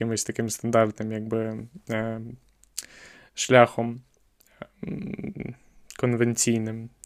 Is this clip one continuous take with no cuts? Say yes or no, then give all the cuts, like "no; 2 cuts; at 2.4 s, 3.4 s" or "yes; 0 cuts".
yes; 0 cuts